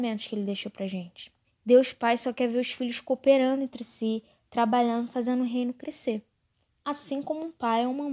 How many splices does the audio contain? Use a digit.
1